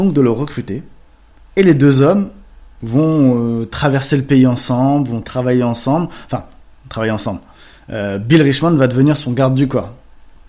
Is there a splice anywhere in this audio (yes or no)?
no